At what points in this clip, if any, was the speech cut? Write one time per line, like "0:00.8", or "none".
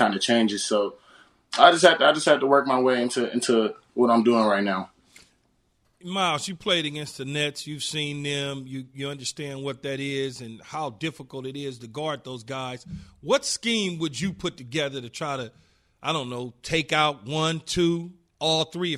none